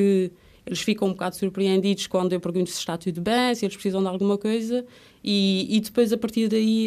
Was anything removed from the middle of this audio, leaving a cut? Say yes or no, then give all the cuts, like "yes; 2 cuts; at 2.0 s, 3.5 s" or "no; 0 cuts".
no; 0 cuts